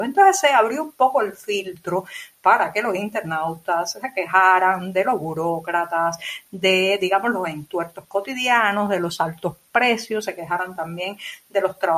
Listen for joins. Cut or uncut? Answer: uncut